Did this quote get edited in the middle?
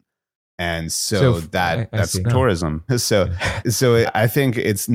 yes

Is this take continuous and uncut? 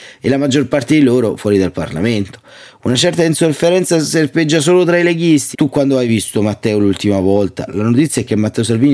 no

